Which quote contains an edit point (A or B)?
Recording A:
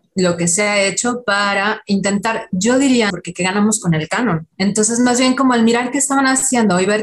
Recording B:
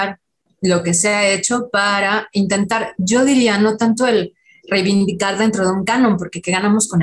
A